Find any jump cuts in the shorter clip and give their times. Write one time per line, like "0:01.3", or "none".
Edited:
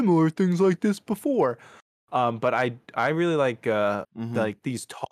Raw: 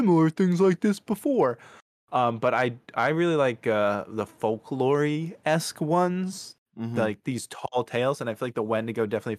0:04.0